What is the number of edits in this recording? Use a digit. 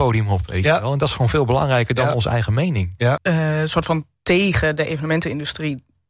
1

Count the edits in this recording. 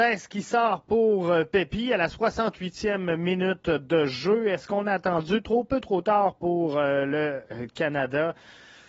0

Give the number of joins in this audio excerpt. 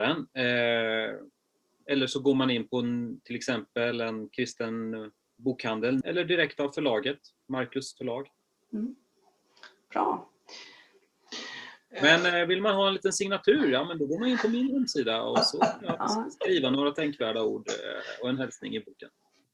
1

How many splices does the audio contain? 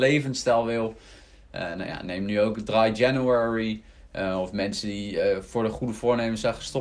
0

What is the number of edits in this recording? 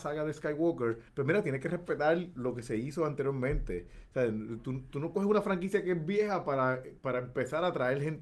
1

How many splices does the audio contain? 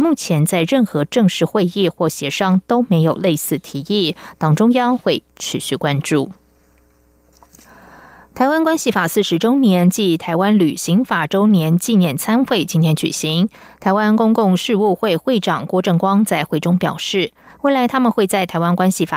1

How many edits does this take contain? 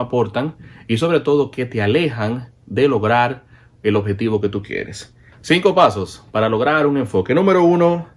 1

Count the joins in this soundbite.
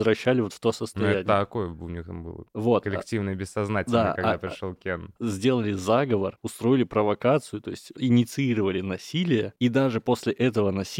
1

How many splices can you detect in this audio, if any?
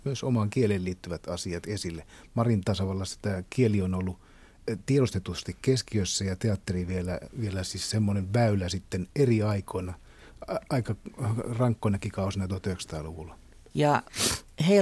1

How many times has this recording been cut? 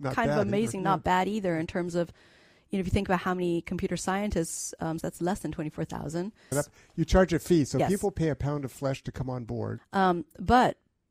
3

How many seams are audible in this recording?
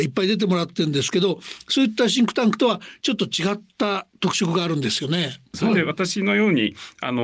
1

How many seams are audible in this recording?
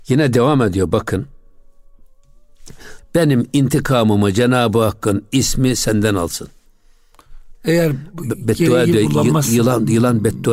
1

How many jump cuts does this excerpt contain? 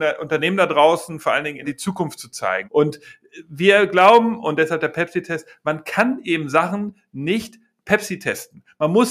2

